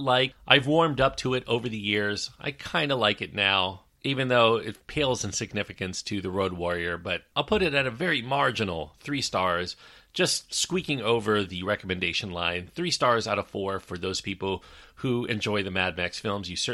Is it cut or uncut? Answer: uncut